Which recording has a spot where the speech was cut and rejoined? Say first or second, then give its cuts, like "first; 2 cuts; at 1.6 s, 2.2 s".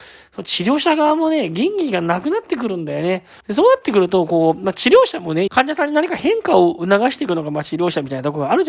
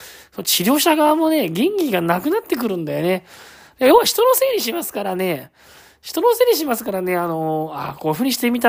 first; 2 cuts; at 3.4 s, 5.5 s